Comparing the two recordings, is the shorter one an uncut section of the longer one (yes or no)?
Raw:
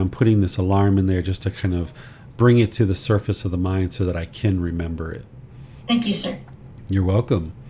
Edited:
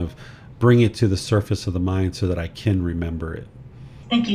yes